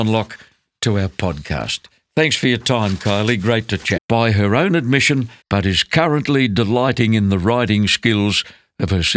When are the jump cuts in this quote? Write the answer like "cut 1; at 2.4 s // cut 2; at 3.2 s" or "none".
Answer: cut 1; at 4.0 s // cut 2; at 5.4 s